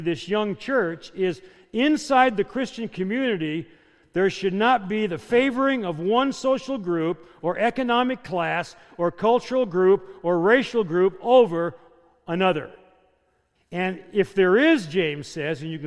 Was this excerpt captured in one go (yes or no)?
no